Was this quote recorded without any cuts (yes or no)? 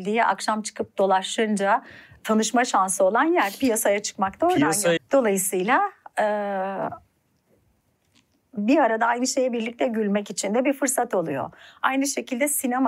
no